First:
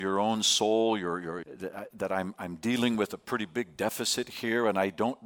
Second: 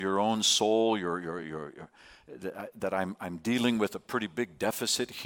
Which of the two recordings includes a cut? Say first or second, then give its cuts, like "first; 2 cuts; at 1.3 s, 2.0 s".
first; 1 cut; at 1.4 s